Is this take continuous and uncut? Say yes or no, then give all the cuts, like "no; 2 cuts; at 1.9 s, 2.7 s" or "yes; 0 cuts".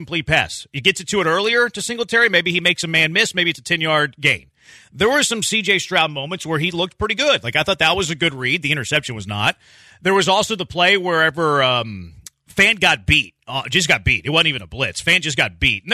yes; 0 cuts